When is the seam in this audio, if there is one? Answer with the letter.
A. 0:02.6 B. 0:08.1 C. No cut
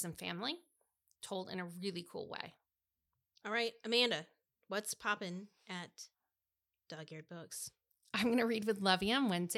C